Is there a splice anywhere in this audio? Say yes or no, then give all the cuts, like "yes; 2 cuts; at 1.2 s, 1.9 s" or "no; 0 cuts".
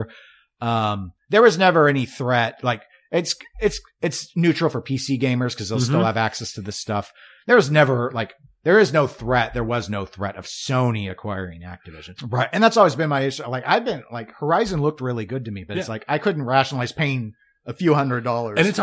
yes; 1 cut; at 12.2 s